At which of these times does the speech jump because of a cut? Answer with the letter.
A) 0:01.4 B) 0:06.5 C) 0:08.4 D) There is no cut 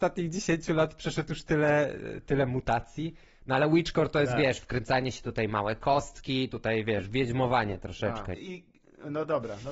C